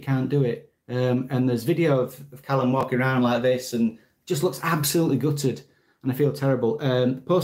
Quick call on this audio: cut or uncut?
uncut